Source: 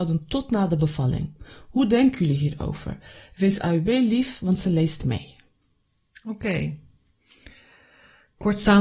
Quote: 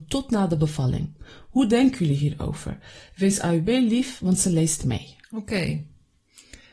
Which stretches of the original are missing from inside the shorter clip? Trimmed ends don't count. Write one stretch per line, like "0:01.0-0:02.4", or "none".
0:05.4-0:06.2